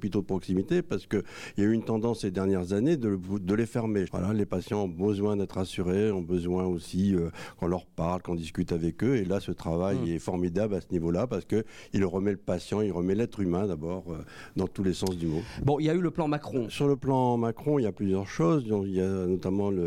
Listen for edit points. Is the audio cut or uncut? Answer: cut